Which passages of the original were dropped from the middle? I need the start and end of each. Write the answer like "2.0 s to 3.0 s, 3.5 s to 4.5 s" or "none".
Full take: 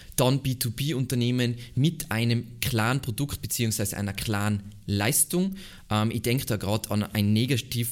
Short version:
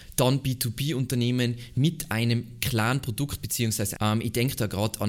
4.0 s to 5.9 s